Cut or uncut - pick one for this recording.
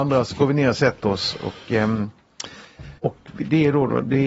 cut